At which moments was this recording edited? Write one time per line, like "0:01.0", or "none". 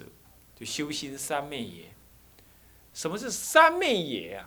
none